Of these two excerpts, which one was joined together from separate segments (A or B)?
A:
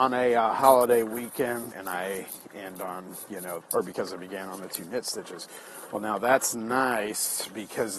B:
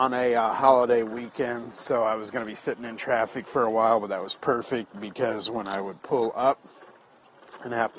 A